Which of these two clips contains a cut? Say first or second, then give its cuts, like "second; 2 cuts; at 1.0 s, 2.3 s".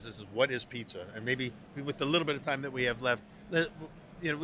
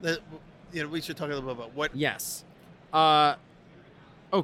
second; 1 cut; at 1.9 s